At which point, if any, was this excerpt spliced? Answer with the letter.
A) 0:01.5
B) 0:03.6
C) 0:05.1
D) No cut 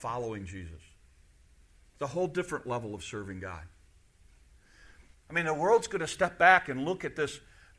C